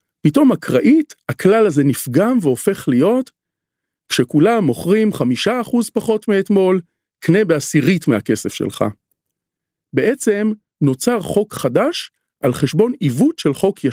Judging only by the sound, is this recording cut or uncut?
uncut